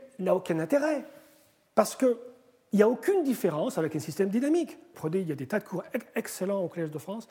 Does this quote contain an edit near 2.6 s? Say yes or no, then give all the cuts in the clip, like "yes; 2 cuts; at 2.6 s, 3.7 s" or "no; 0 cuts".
no; 1 cut; at 4.9 s